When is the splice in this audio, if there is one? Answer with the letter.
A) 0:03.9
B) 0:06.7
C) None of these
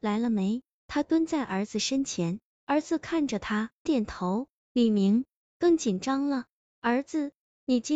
A